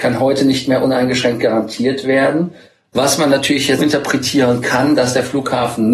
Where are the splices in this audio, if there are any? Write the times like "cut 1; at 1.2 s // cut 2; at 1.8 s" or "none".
cut 1; at 3.8 s